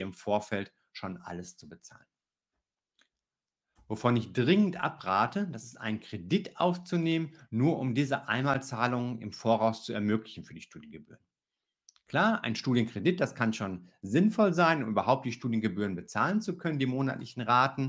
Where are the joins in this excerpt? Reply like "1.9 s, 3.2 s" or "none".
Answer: none

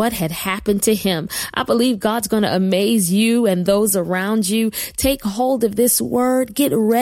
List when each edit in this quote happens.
none

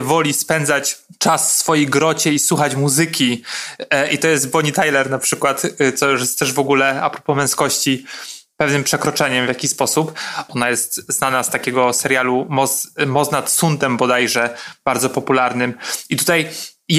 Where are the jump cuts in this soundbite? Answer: 10.5 s

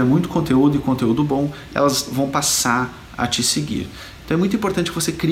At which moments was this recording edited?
4.2 s

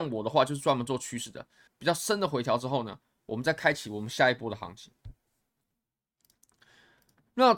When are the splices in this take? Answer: 1.7 s, 3.1 s

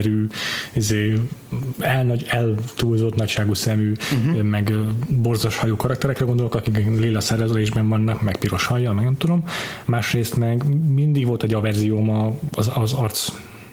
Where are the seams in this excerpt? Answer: 9.8 s, 12.5 s

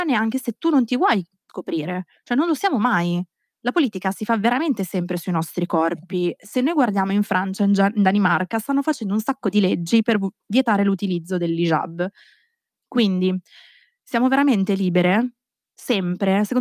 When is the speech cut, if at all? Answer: 12.8 s

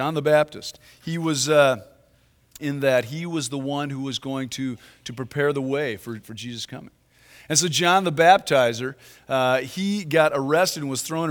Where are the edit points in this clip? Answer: 2.6 s, 6.2 s

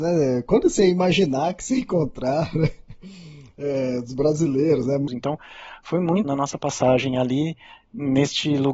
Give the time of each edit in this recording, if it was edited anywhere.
5.1 s, 6.2 s

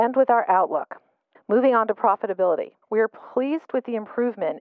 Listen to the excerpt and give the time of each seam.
1.3 s, 2.8 s

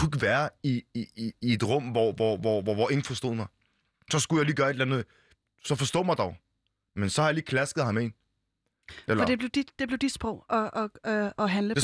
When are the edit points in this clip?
none

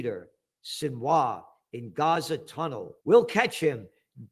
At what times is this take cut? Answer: 3.0 s

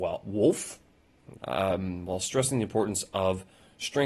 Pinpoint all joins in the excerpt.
1.4 s

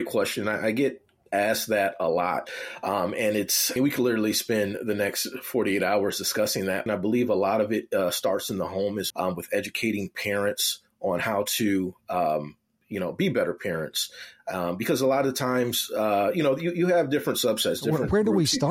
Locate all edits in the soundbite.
3.8 s, 6.9 s, 9.1 s

